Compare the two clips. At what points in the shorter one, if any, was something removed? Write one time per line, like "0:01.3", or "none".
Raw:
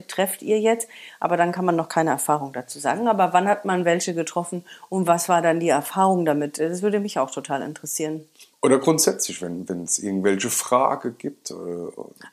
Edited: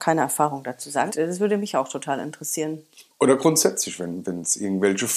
0:01.1